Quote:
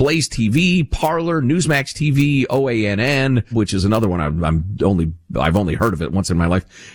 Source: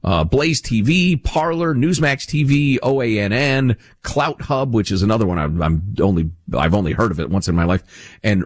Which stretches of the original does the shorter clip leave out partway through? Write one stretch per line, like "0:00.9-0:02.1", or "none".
0:03.8-0:04.7

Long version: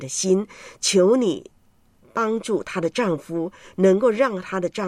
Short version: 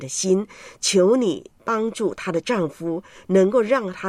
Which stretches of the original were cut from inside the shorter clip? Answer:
0:01.6-0:02.1

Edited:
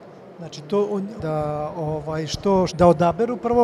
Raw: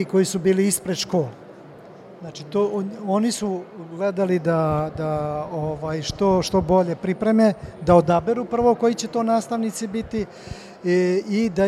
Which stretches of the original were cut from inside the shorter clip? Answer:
0:03.0-0:04.9
0:06.4-0:07.8

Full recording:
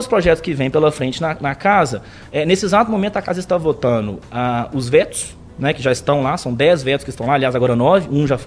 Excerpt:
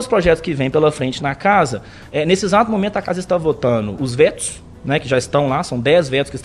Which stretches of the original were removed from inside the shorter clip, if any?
0:01.2-0:01.4
0:04.1-0:04.7

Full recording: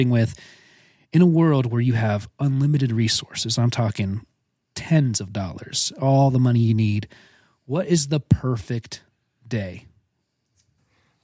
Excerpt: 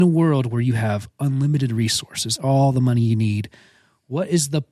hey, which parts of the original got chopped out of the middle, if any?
0:03.6-0:05.9

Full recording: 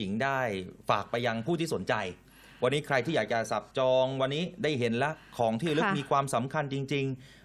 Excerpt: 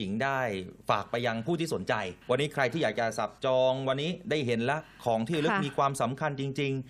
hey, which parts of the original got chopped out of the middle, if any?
0:02.2-0:02.5

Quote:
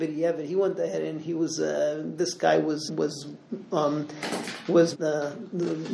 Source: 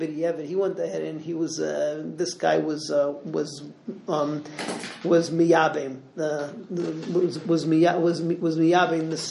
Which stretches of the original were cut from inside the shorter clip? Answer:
0:02.9-0:03.2
0:05.3-0:06.1

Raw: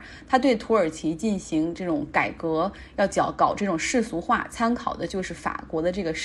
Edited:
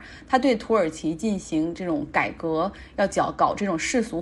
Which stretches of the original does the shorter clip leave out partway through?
none

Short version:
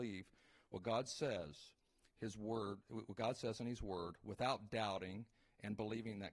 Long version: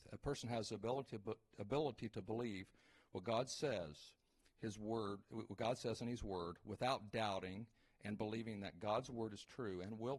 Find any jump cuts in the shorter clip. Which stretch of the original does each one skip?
none

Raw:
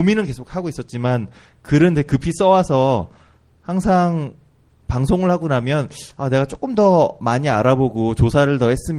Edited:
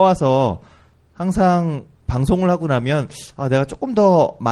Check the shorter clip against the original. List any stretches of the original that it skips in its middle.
0:04.4-0:04.8

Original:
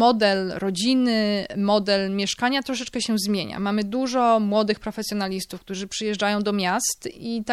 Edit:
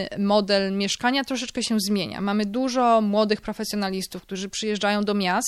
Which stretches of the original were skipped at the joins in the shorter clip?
none

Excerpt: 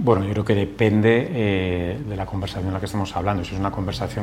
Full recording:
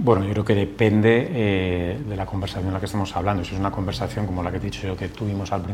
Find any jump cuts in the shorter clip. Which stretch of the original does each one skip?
none

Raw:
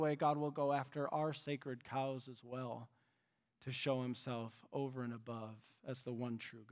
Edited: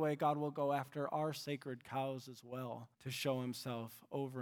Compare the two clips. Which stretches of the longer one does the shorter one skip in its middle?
0:02.9-0:03.5

